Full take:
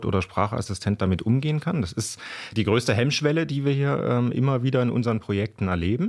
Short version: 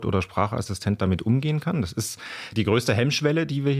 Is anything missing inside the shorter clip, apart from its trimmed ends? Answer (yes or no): no